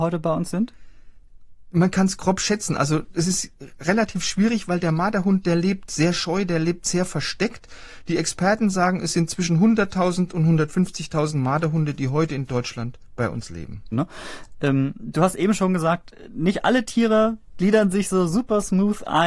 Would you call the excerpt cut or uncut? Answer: cut